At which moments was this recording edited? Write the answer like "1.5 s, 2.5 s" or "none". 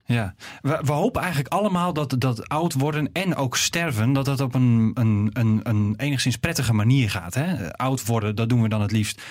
none